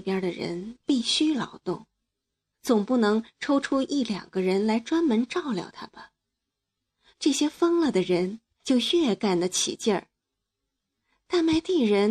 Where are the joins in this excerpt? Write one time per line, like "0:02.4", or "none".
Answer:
0:02.5
0:07.1
0:08.6